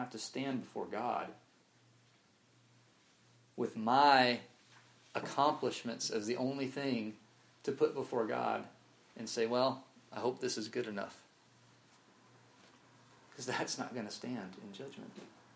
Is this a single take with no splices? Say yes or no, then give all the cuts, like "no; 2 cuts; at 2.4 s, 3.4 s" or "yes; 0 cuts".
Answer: yes; 0 cuts